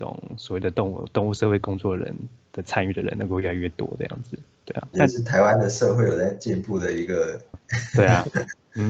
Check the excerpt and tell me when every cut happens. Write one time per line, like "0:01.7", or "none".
0:04.9
0:07.5